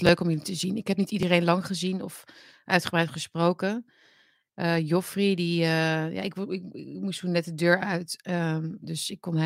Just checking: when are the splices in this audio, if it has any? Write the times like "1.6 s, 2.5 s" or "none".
none